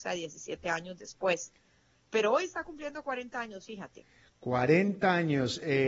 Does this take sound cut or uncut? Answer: uncut